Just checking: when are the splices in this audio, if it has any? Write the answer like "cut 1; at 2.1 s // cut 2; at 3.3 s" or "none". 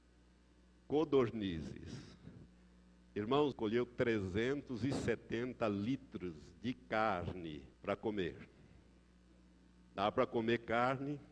cut 1; at 3.5 s // cut 2; at 7.7 s

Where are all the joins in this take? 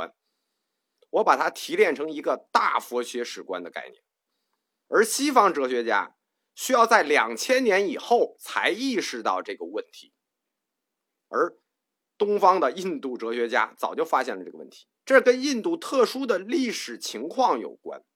cut 1; at 4.9 s // cut 2; at 15.0 s

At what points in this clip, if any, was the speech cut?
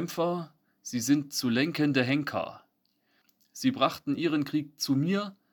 none

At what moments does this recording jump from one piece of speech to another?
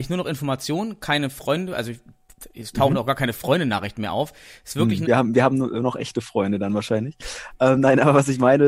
cut 1; at 5.1 s

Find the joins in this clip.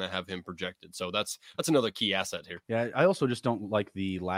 cut 1; at 2.6 s

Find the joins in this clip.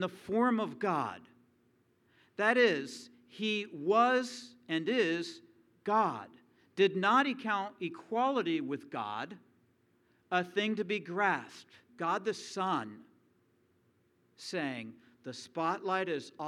cut 1; at 11.9 s

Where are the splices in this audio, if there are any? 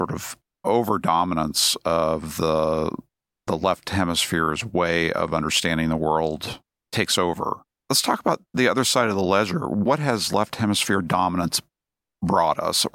cut 1; at 7.8 s

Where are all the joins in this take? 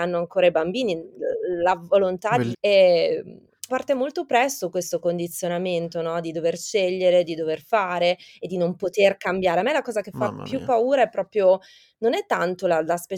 cut 1; at 2.5 s // cut 2; at 3.7 s

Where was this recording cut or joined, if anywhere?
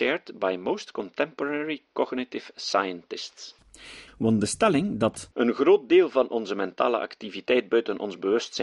cut 1; at 4.1 s

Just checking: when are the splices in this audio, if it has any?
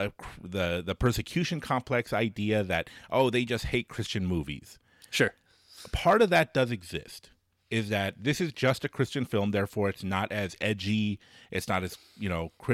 none

